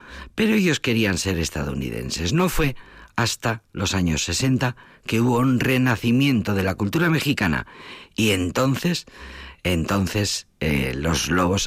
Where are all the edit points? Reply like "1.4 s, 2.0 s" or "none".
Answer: none